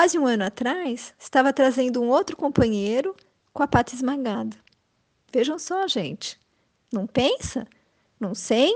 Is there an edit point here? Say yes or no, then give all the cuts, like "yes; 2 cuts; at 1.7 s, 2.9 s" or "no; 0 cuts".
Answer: no; 0 cuts